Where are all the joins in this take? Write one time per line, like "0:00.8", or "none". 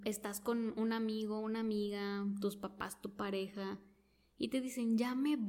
none